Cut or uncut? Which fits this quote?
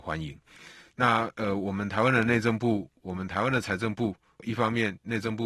uncut